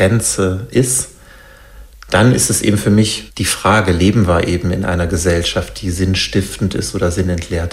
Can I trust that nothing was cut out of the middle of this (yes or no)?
yes